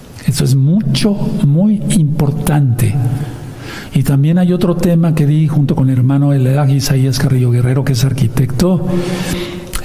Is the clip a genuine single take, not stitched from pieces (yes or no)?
yes